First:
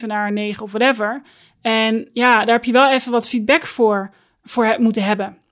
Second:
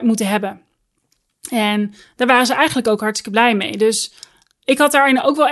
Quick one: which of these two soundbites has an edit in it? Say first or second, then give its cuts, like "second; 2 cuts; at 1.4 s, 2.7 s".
first; 1 cut; at 4.4 s